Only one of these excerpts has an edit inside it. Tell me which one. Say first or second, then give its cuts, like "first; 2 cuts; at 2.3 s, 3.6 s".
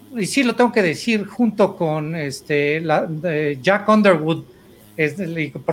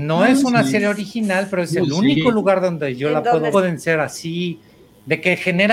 second; 1 cut; at 3.5 s